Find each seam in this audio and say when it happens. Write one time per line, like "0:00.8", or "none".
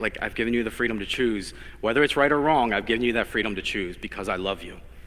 none